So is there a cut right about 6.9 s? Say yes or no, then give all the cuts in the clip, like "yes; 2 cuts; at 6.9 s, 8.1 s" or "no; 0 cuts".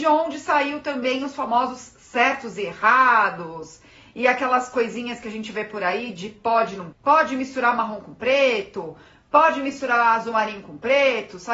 yes; 1 cut; at 6.9 s